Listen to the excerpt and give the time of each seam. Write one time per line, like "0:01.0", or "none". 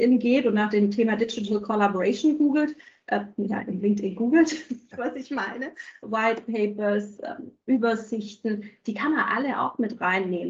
0:04.9
0:06.0